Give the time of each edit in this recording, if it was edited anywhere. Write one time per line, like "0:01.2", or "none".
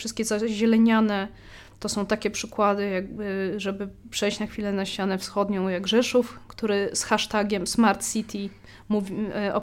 none